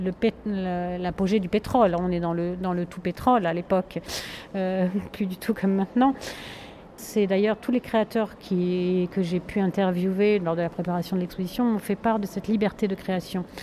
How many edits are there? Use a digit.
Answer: 1